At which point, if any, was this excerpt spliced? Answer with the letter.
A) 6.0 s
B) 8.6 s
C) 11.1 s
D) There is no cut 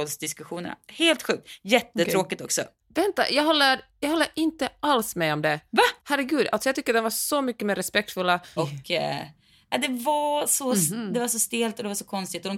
B